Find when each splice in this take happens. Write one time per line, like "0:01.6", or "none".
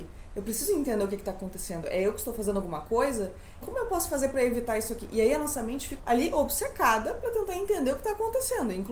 0:03.6
0:06.0